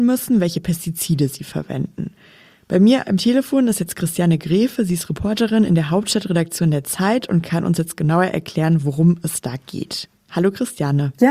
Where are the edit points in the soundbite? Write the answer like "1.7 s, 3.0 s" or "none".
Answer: none